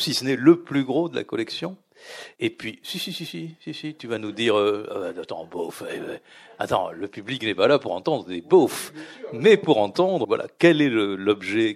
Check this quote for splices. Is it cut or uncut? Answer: cut